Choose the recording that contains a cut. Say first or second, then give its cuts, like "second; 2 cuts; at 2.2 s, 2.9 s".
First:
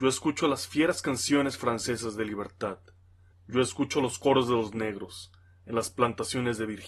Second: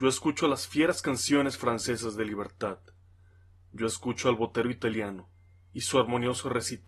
first; 1 cut; at 3.3 s